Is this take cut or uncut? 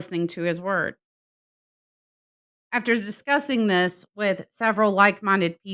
uncut